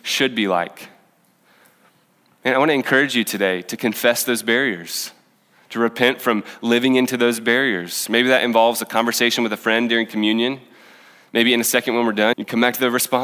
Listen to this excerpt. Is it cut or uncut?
cut